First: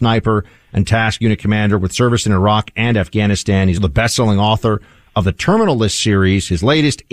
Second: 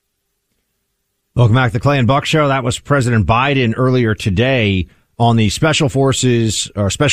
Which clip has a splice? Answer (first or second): first